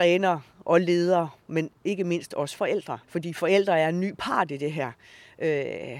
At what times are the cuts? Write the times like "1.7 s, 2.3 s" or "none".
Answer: 3.0 s